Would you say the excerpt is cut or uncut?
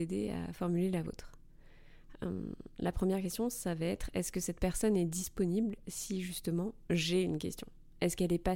uncut